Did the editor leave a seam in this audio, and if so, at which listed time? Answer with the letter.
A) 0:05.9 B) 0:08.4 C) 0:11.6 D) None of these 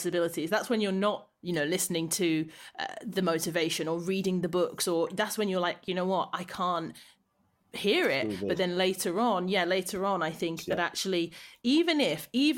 D